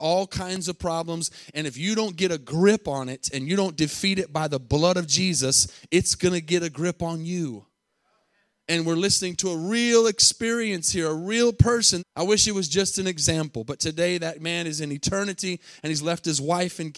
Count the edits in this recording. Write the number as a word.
one